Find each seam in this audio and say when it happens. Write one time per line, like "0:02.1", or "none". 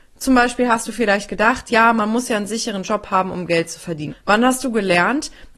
0:04.1

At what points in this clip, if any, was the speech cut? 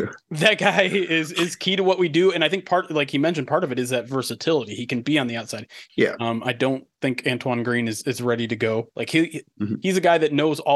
0:05.9
0:08.9

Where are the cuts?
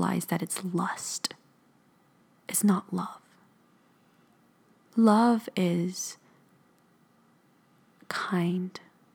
none

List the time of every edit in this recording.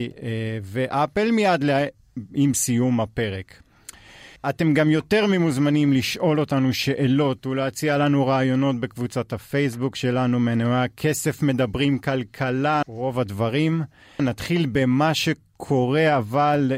0:04.4
0:12.8
0:14.2

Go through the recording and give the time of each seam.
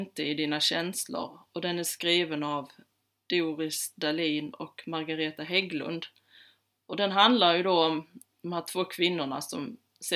none

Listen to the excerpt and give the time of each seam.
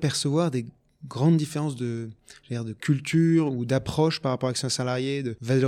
none

